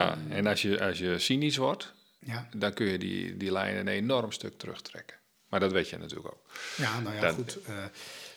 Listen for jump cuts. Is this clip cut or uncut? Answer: uncut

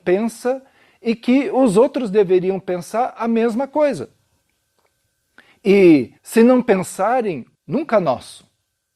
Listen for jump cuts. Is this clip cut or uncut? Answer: cut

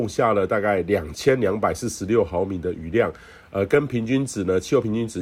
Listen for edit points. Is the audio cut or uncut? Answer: uncut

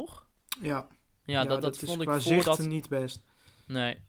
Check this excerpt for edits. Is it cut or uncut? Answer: uncut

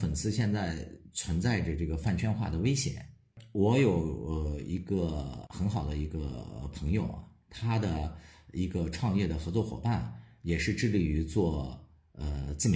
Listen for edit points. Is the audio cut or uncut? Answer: uncut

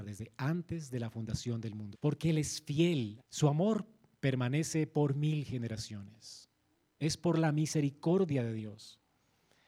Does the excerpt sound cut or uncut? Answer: cut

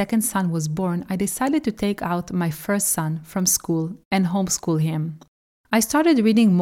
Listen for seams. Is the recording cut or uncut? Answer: cut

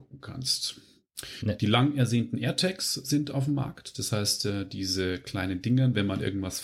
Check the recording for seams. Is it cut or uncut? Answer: uncut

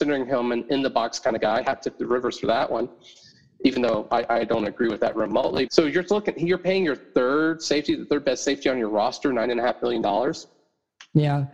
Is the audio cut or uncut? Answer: cut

